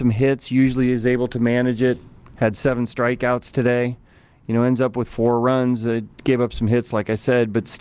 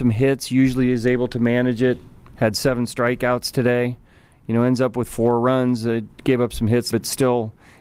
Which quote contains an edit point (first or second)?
second